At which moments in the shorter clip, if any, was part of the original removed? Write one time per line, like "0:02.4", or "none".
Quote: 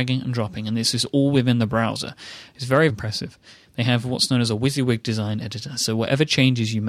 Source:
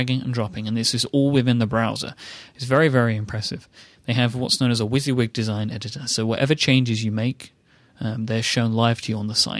0:02.9